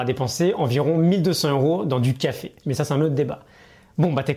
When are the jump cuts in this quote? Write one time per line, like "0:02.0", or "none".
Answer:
0:02.6